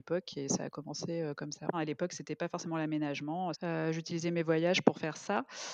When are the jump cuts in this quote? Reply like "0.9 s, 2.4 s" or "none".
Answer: 1.7 s, 3.5 s

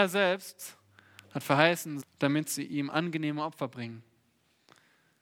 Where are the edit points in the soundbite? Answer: 2.0 s

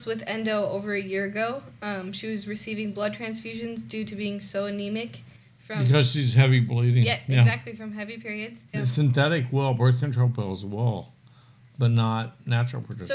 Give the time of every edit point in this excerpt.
8.7 s

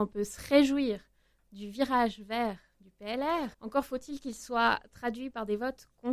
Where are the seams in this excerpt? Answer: 3.5 s

